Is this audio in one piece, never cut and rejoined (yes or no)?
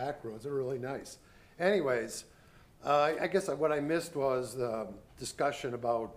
yes